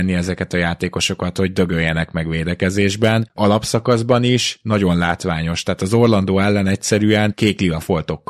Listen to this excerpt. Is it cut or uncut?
uncut